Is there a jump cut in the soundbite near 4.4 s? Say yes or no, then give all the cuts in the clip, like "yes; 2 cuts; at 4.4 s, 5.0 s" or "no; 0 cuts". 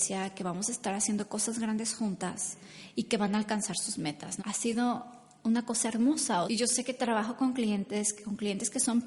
yes; 2 cuts; at 4.4 s, 6.5 s